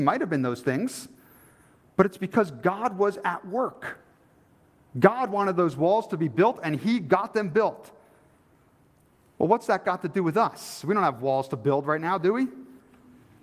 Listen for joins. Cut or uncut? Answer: uncut